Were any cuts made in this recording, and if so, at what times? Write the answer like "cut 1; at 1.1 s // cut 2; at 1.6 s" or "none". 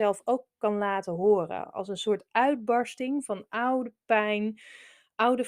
none